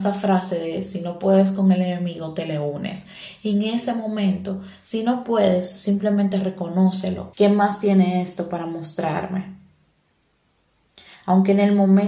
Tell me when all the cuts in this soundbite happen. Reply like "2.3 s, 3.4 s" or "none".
7.3 s